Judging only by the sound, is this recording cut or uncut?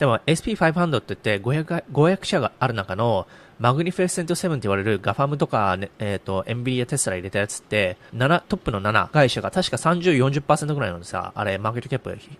cut